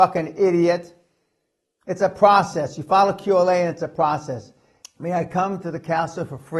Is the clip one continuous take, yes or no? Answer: no